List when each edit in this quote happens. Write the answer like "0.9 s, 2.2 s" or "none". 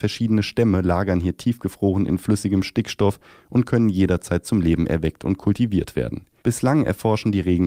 6.4 s

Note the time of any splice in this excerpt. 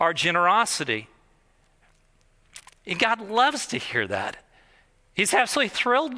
none

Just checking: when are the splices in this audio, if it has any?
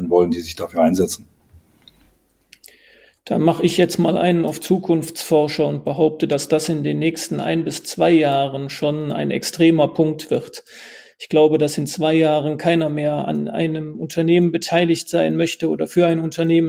none

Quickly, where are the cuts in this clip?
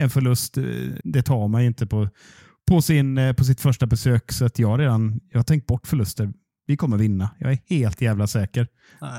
1.0 s

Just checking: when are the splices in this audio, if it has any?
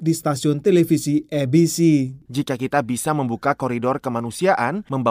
2.3 s

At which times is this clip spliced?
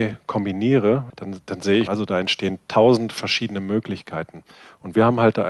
1.9 s

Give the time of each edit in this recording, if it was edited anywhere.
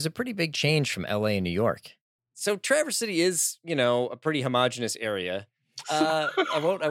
5.8 s

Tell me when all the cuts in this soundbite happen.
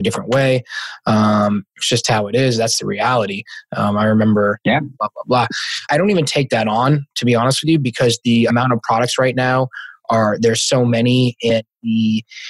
4.9 s

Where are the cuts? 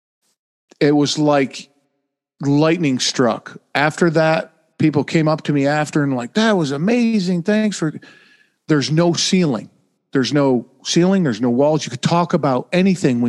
none

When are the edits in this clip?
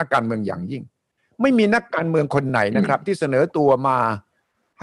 none

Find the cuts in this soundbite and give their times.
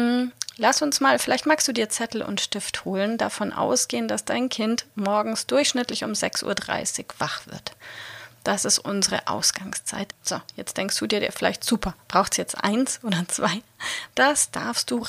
10.1 s, 12.0 s, 14.1 s

